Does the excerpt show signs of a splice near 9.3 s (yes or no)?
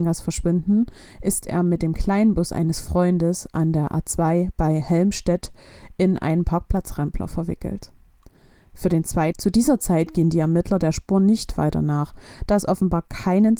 yes